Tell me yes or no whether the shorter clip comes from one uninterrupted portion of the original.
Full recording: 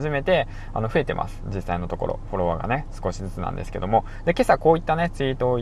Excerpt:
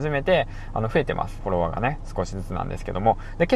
no